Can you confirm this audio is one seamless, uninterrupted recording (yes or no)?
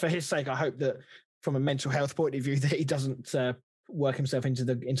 yes